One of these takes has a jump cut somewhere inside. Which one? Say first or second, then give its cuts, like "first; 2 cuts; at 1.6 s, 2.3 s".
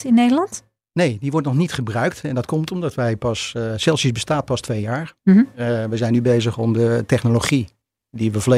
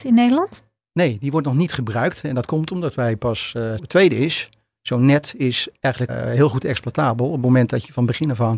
second; 2 cuts; at 3.8 s, 6.1 s